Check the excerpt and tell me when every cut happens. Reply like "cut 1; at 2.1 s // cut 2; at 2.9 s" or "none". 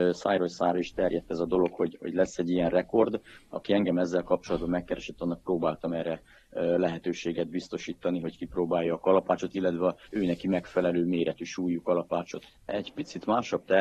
cut 1; at 10.1 s // cut 2; at 12.6 s